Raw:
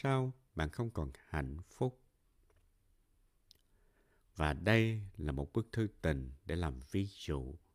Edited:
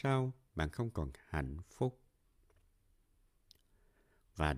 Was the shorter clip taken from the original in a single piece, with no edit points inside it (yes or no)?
yes